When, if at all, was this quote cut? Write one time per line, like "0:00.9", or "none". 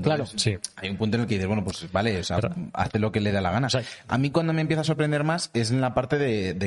none